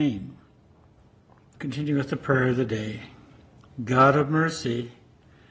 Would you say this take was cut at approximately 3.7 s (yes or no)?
no